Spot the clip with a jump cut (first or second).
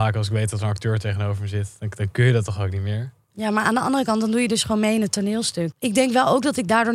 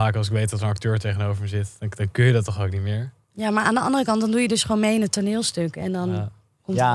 first